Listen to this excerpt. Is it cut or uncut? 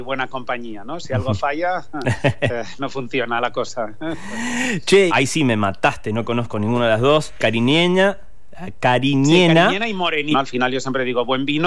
cut